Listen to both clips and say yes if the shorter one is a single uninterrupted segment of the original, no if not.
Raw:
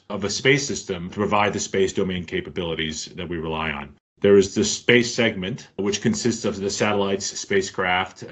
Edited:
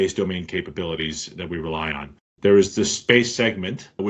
yes